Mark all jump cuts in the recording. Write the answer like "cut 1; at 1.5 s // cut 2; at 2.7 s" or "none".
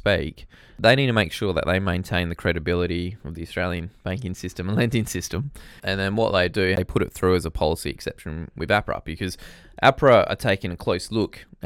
cut 1; at 5.8 s